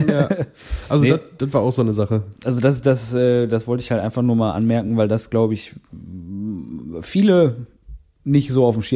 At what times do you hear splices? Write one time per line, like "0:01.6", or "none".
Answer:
none